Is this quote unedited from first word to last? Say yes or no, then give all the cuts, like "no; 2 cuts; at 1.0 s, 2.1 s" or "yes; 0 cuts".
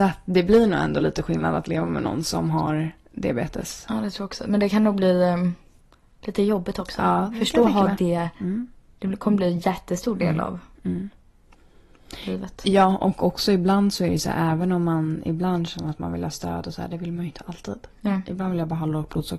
yes; 0 cuts